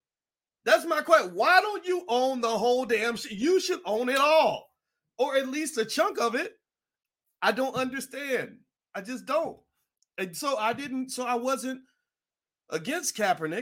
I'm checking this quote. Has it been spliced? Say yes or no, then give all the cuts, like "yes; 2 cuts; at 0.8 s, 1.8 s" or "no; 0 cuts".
no; 0 cuts